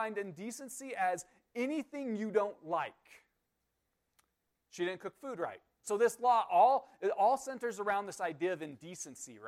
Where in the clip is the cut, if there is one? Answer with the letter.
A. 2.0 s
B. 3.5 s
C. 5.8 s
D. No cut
C